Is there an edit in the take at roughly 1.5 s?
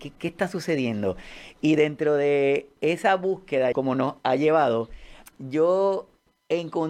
no; 2 cuts; at 3.7 s, 5.3 s

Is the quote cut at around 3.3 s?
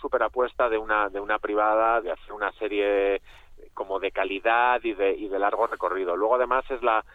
no; 1 cut; at 2.0 s

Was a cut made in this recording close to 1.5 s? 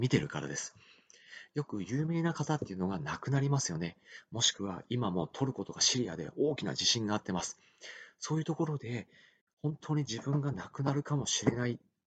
no; 0 cuts

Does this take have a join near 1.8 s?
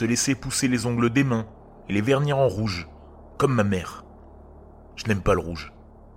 yes; 1 cut; at 1.8 s

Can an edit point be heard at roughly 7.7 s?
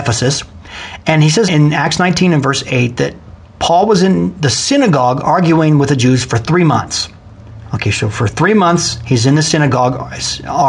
no; 1 cut; at 1.5 s

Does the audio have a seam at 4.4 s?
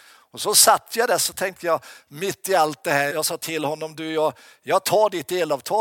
no; 1 cut; at 3.1 s

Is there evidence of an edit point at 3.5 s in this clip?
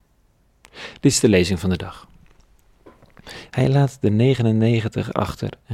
yes; 1 cut; at 3.5 s

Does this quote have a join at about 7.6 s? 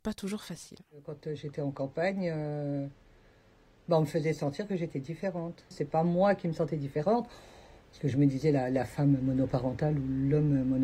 no; 1 cut; at 5.7 s

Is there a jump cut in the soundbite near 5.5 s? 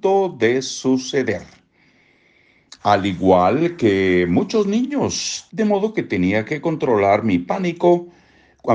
yes; 2 cuts; at 2.8 s, 5.5 s

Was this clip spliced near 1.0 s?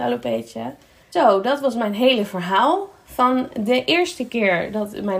yes; 1 cut; at 1.0 s

